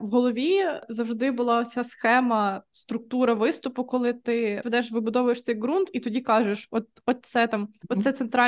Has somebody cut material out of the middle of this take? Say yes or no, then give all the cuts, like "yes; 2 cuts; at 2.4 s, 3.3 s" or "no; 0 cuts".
yes; 1 cut; at 4.6 s